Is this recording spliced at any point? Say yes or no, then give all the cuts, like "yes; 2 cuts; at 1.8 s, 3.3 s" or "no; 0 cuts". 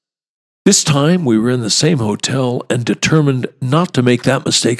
no; 0 cuts